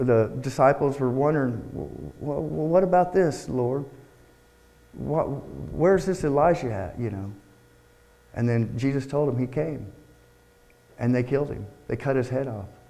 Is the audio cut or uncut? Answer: uncut